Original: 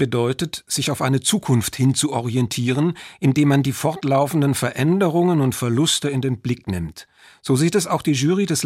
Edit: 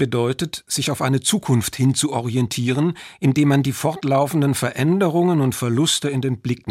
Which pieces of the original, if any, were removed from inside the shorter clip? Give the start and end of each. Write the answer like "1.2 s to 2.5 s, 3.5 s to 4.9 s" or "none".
none